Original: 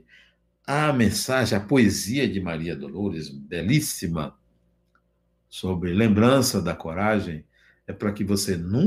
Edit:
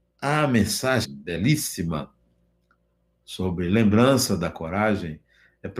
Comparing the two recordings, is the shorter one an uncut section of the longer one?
no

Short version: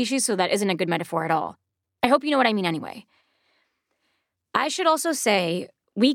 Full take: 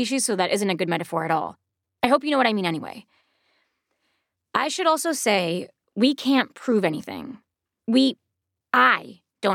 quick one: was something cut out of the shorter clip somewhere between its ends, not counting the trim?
no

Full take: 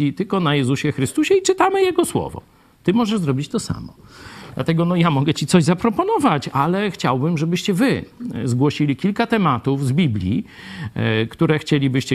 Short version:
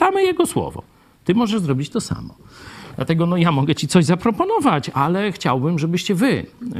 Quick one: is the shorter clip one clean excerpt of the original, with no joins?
yes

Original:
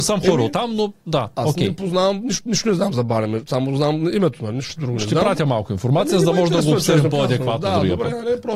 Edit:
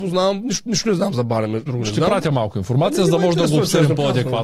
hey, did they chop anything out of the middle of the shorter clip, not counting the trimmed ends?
yes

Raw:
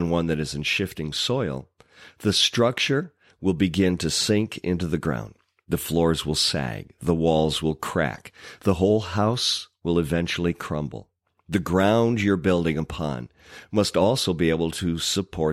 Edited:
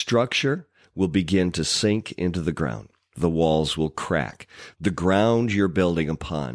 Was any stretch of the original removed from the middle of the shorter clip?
yes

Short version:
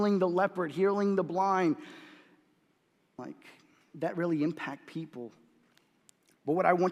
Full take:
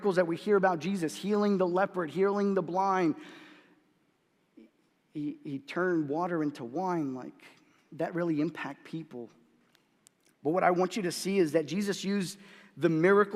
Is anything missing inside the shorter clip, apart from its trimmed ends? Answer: yes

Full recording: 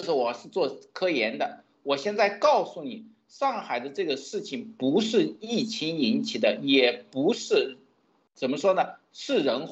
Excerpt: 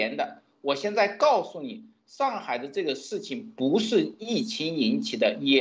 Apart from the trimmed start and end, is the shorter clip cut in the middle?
no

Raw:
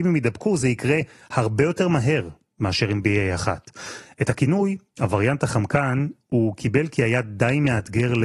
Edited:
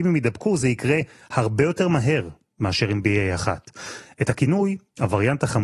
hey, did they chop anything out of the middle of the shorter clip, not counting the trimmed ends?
no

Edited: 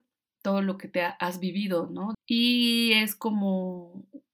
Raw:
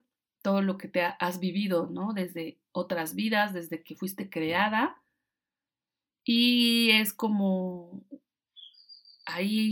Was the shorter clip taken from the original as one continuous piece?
no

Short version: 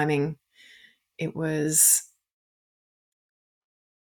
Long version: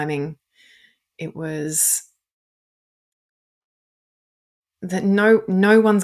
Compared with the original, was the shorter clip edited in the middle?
no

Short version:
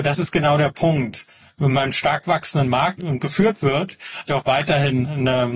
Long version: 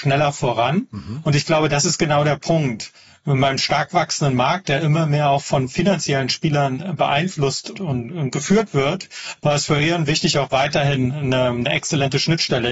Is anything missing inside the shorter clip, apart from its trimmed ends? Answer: yes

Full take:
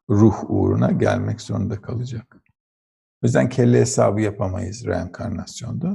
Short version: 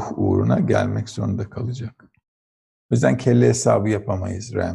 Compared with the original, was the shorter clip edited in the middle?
no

